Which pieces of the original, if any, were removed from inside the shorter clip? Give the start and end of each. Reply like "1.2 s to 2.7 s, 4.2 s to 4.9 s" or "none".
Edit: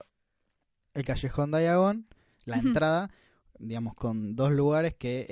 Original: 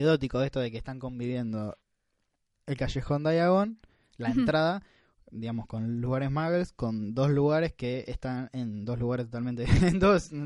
5.7 s to 6.7 s